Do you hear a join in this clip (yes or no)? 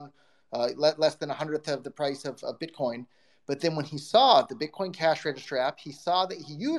no